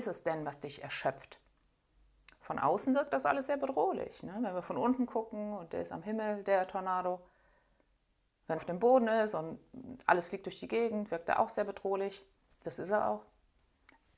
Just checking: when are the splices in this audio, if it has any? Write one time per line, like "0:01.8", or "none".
0:08.6